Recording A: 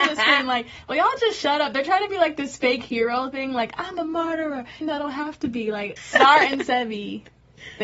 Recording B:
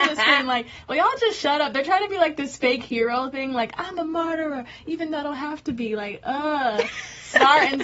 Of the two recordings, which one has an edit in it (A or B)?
A